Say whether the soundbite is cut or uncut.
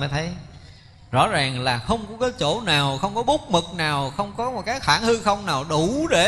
uncut